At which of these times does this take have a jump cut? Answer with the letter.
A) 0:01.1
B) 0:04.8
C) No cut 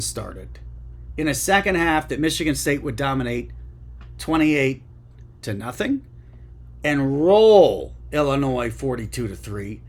C